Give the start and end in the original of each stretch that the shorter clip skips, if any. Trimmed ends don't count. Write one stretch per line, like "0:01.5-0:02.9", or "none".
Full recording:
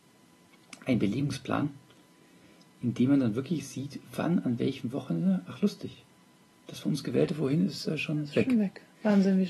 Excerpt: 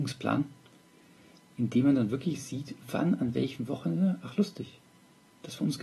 none